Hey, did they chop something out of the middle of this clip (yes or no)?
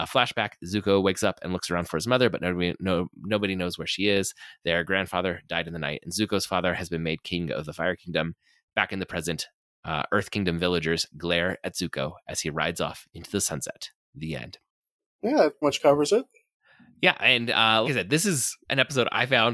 yes